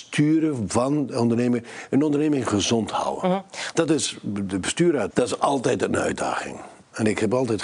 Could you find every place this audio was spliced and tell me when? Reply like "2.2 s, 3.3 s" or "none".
3.7 s, 5.1 s